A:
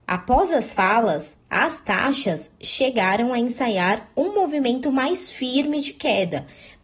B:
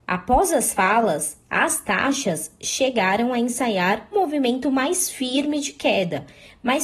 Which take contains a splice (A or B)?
B